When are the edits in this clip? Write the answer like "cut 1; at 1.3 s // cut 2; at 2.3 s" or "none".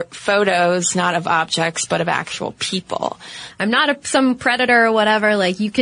cut 1; at 3.5 s